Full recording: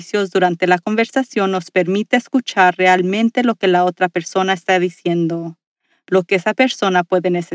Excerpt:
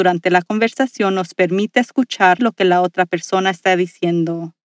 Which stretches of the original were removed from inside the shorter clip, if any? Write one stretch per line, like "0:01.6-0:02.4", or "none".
0:02.8-0:03.4